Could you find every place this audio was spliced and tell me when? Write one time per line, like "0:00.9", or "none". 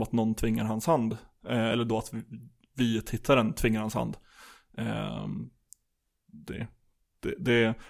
none